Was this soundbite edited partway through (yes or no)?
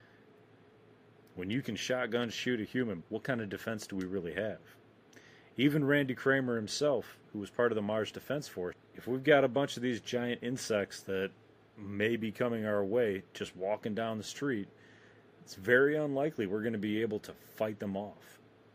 yes